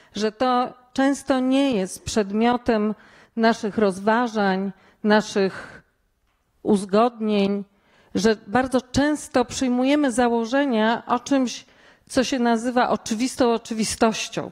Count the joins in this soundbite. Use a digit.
0